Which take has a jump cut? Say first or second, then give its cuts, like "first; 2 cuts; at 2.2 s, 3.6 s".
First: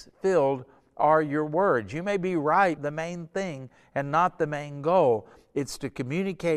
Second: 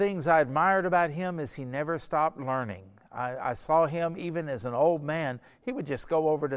first; 1 cut; at 2.8 s